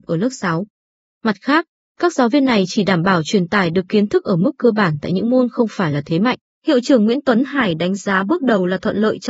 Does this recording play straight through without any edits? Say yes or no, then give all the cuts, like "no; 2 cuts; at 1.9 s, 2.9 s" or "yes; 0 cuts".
no; 2 cuts; at 1.1 s, 6.5 s